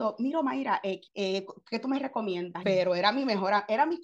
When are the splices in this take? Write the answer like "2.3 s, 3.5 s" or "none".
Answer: 1.1 s, 2.6 s